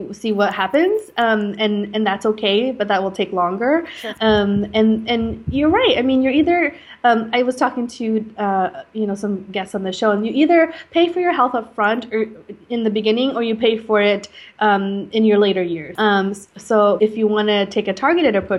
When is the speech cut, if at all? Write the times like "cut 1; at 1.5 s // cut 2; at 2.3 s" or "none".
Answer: cut 1; at 4.2 s // cut 2; at 15.9 s // cut 3; at 17.0 s

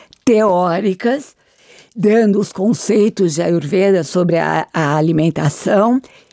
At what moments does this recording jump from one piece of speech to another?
none

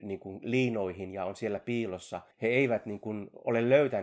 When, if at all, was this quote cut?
cut 1; at 2.3 s

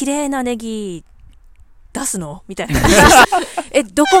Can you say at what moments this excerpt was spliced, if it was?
cut 1; at 3.2 s

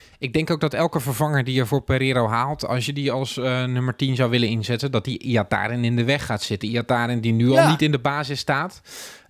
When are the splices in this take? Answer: none

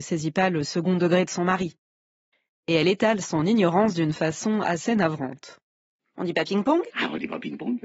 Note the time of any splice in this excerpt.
cut 1; at 6.0 s

